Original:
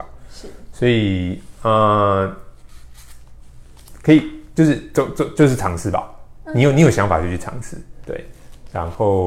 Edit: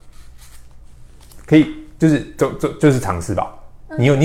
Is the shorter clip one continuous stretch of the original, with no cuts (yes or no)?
yes